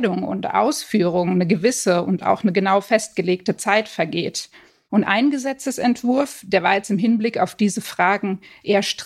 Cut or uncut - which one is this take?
uncut